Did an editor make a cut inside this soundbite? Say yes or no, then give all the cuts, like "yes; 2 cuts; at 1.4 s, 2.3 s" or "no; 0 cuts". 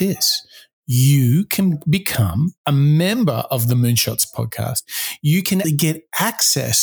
yes; 1 cut; at 5.6 s